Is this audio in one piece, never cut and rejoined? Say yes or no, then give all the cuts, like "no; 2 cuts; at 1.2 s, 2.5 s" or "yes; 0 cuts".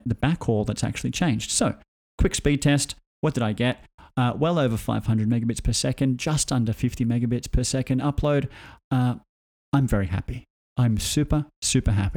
yes; 0 cuts